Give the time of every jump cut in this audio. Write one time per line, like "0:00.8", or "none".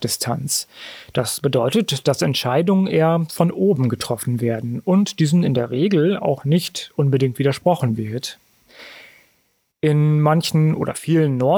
none